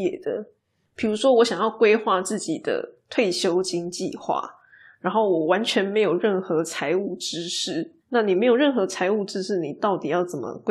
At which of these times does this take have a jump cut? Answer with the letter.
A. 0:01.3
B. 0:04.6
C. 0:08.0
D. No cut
C